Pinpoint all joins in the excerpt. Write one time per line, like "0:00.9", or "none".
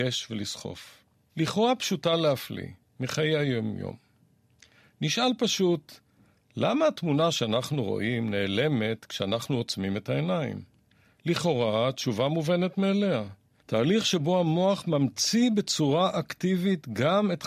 0:01.3
0:13.6